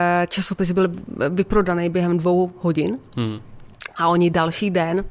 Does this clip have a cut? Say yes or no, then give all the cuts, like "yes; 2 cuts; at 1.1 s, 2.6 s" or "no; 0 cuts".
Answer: no; 0 cuts